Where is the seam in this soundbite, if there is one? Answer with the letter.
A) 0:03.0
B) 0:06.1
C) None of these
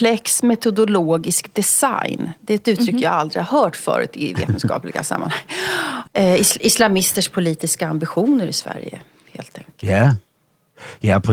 B